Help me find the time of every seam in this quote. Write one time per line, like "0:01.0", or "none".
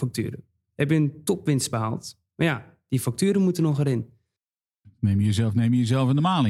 none